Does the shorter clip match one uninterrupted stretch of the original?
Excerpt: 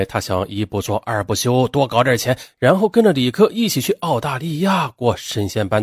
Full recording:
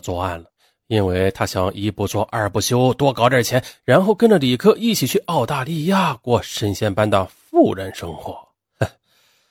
yes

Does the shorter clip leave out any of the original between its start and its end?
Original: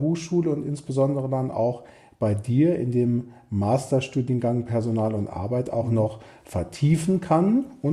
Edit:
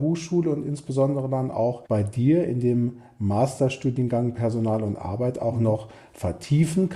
yes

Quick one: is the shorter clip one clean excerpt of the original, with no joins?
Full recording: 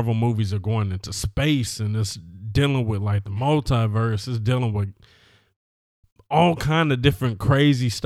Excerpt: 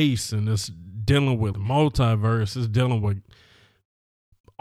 no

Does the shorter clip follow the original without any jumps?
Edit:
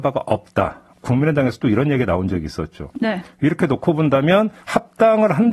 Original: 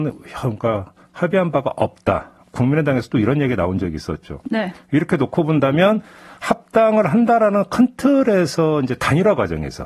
no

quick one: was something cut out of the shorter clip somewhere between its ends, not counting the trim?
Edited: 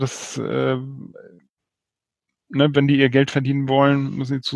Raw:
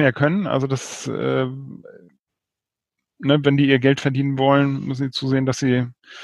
no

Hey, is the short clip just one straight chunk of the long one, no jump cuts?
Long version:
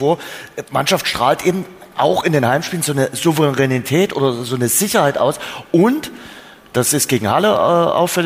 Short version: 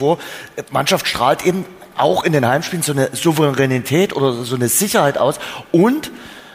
yes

